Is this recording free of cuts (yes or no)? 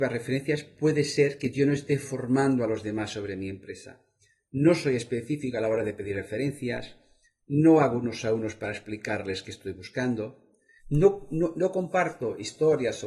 no